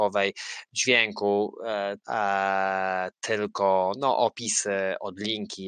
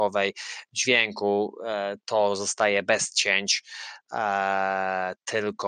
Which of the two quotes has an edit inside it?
first; 1 cut; at 2.0 s

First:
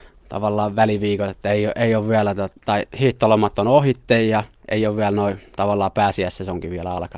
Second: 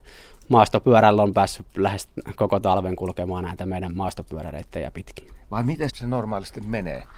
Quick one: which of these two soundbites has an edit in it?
second; 1 cut; at 5.9 s

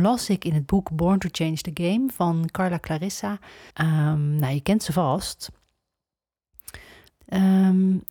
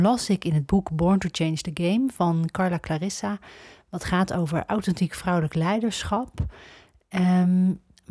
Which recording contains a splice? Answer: first; 2 cuts; at 3.7 s, 7.1 s

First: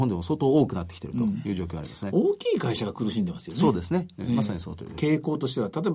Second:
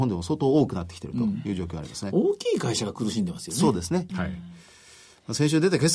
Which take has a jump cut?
second; 1 cut; at 4.1 s

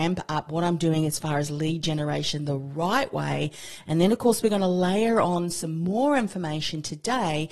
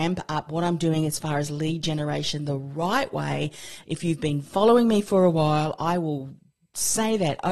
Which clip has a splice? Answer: second; 1 cut; at 3.8 s

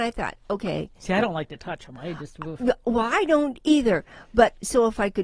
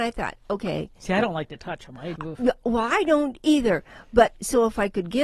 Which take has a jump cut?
second; 1 cut; at 2.2 s

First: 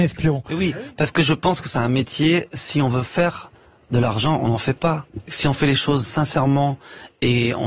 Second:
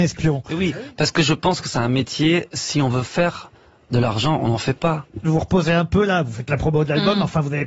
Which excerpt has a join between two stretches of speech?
second; 1 cut; at 5.2 s

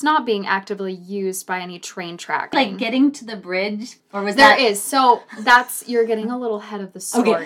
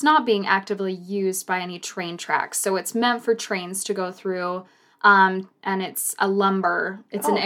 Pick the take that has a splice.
first; 2 cuts; at 2.5 s, 4.0 s

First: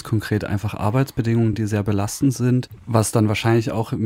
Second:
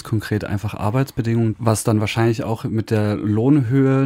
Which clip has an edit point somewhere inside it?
second; 1 cut; at 1.5 s

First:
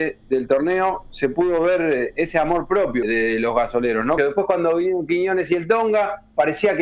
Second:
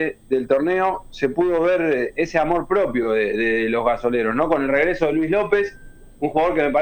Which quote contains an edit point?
first; 2 cuts; at 3.0 s, 4.2 s

